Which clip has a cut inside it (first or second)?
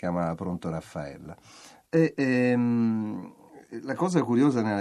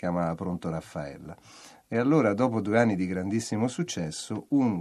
first